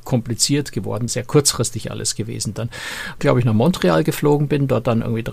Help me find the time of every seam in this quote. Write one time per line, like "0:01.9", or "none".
0:01.1
0:03.2